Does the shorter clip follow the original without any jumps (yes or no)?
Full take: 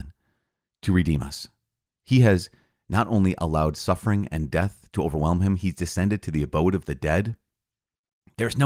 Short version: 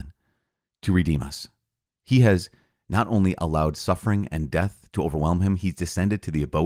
yes